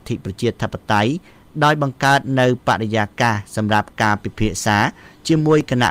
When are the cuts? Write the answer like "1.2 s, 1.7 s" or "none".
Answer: none